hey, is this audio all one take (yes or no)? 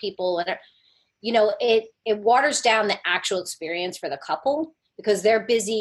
yes